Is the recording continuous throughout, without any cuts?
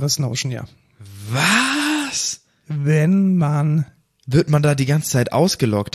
yes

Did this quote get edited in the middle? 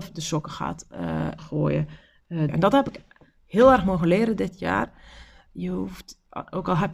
yes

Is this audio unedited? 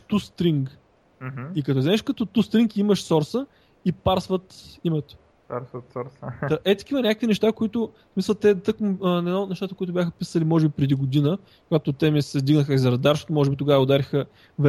yes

